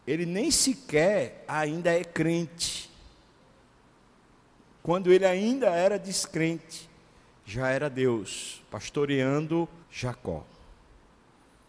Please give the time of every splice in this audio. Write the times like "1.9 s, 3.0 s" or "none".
4.8 s, 9.8 s